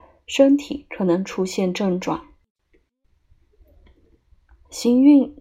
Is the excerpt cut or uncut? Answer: uncut